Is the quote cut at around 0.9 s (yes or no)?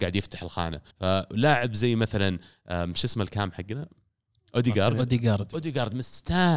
yes